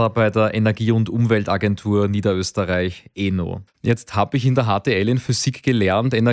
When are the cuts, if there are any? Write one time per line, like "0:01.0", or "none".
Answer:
0:03.7

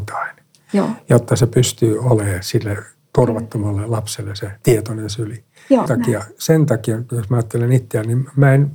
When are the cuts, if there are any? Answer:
0:05.9

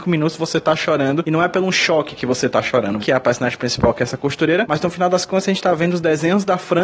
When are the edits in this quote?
0:03.0

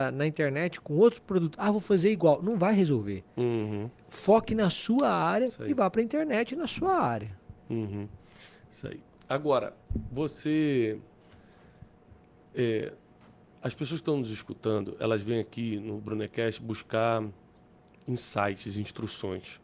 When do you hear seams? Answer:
none

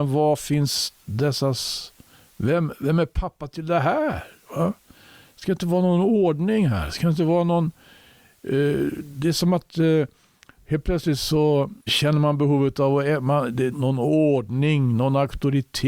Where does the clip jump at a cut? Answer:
0:11.9
0:13.7

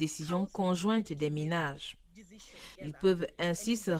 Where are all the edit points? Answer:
0:02.8

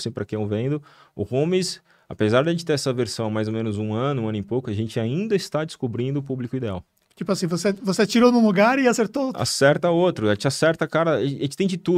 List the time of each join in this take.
none

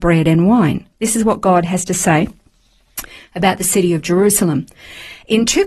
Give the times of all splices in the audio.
0:00.9

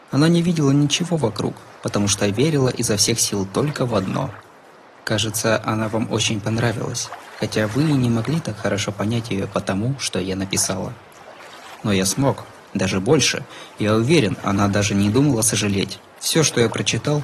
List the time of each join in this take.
none

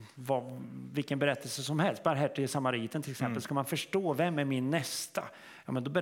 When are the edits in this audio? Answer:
none

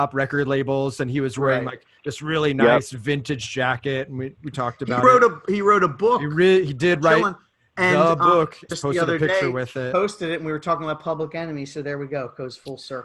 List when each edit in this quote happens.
0:08.7

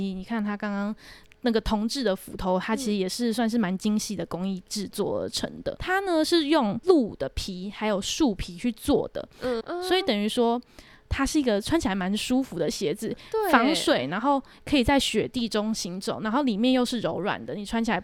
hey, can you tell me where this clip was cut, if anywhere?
0:05.8
0:09.6

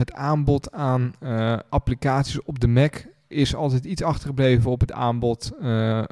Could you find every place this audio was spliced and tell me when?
none

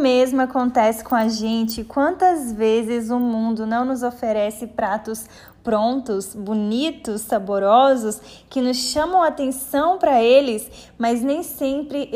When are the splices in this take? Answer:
none

